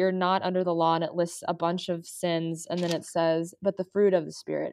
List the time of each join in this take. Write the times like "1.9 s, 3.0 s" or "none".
none